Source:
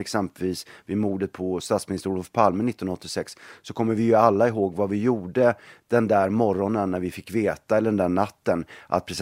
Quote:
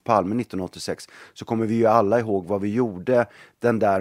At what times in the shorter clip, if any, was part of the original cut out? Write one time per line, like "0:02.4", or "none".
none